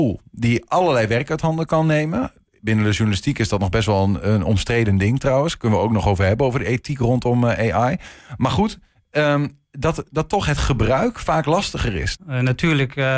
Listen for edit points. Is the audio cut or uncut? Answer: cut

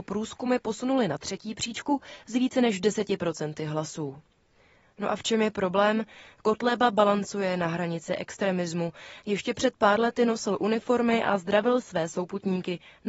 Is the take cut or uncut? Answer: uncut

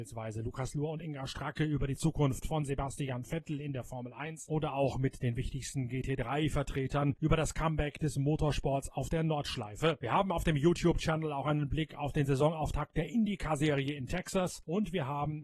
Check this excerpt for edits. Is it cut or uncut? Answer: uncut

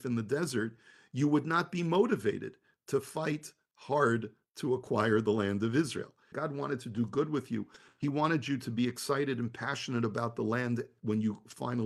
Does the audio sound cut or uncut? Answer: cut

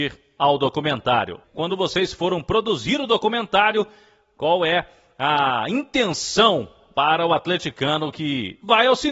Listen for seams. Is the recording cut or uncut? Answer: cut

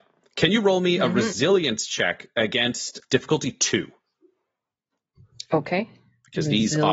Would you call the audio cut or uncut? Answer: cut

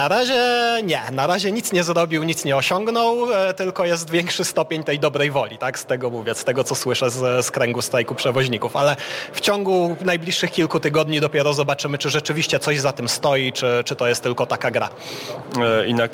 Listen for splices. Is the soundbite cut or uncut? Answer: uncut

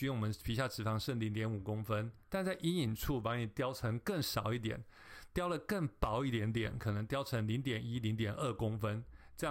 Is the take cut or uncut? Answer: uncut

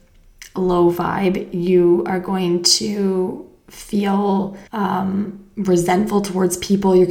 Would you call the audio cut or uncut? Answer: cut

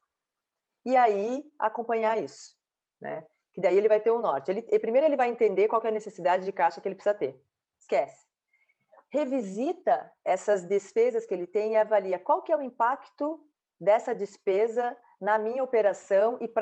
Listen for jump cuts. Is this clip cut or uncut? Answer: cut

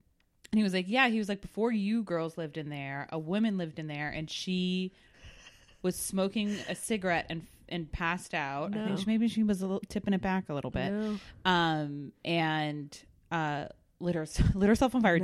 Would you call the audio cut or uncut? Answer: uncut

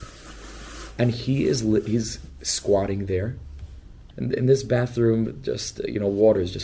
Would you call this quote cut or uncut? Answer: cut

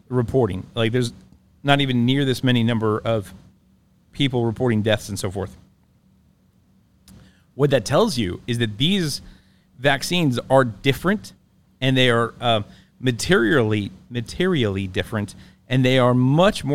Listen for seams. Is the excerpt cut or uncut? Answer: uncut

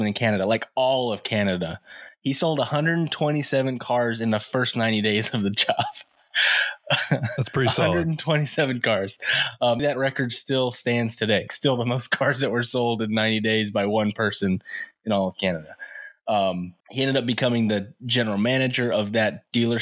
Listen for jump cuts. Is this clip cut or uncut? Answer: cut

